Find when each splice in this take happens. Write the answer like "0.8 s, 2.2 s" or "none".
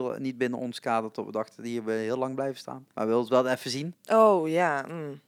2.9 s, 3.9 s